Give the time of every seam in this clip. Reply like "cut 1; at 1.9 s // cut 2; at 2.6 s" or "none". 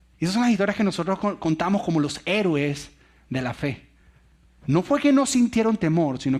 none

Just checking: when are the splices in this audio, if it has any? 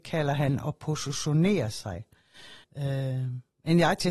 cut 1; at 2.6 s

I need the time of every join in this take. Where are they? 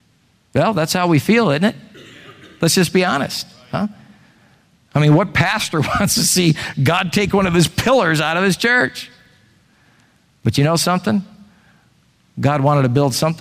none

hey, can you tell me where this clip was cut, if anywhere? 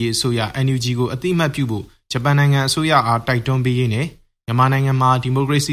none

